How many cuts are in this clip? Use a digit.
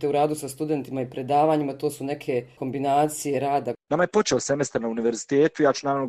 1